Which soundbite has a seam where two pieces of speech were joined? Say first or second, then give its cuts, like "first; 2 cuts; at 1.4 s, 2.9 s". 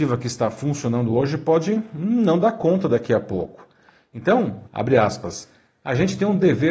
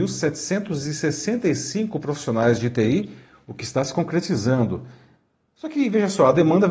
first; 1 cut; at 4.7 s